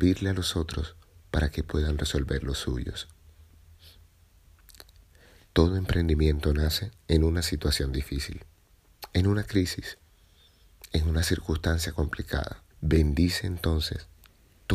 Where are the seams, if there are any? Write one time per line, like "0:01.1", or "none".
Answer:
0:12.7